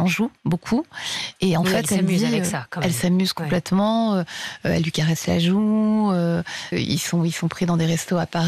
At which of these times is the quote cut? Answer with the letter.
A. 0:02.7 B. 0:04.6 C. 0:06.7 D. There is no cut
C